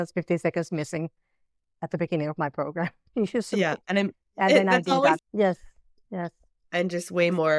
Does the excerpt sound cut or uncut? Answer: cut